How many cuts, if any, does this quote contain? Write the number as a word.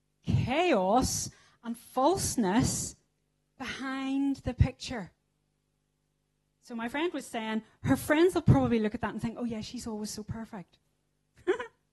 zero